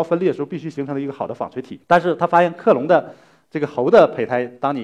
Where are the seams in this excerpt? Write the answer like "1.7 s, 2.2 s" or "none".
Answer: 1.8 s

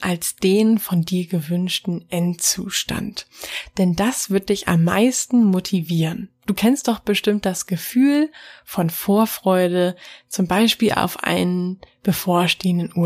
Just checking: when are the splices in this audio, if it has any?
none

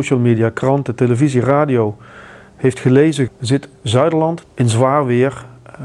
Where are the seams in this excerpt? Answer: 3.3 s, 4.4 s

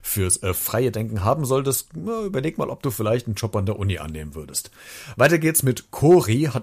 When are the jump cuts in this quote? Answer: none

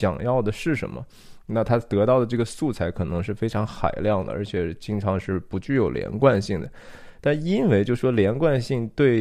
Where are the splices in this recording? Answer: none

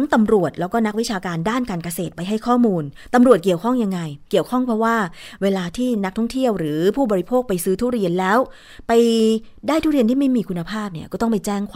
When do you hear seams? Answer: 4.3 s

